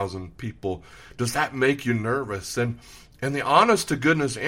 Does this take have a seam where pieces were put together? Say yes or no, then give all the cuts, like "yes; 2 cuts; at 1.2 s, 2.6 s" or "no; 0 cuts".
no; 0 cuts